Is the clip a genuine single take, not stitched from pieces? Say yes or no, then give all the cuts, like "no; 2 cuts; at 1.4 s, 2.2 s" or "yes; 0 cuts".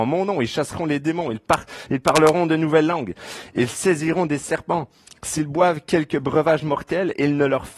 yes; 0 cuts